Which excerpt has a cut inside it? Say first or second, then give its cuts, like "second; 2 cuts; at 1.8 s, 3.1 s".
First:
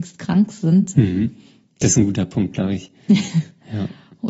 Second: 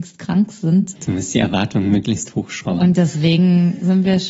second; 1 cut; at 0.9 s